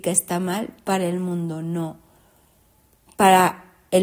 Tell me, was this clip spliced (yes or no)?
no